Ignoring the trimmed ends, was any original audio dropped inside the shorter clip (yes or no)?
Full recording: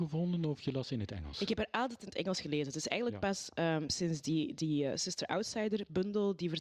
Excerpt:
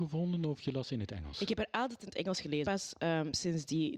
yes